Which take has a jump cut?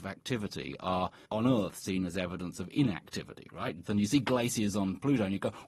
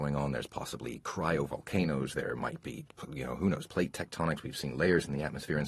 first; 2 cuts; at 1.2 s, 3.8 s

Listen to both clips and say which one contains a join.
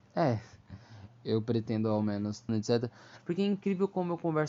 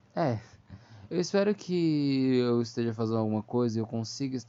first; 2 cuts; at 1.1 s, 2.5 s

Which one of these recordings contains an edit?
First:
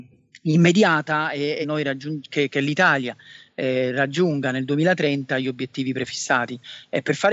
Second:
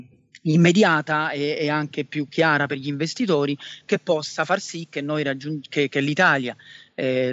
first; 1 cut; at 1.6 s

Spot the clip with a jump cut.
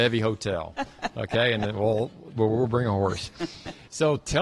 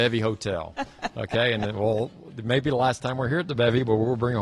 first; 1 cut; at 2.3 s

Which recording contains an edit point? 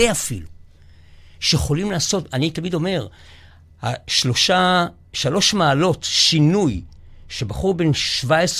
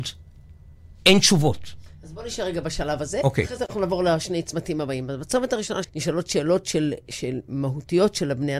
second; 1 cut; at 5.8 s

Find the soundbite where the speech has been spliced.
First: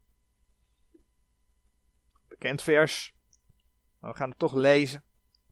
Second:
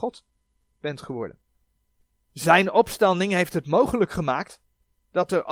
second; 1 cut; at 2.3 s

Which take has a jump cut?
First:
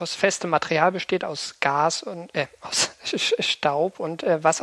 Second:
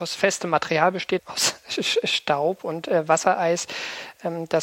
second; 1 cut; at 1.2 s

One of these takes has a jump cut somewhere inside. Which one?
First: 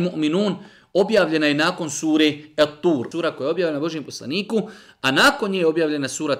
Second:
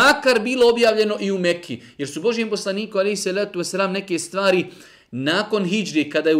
first; 1 cut; at 3.1 s

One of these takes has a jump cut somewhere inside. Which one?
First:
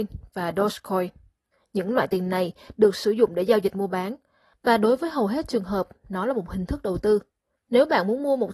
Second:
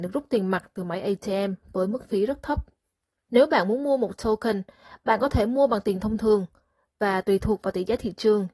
first; 1 cut; at 7.5 s

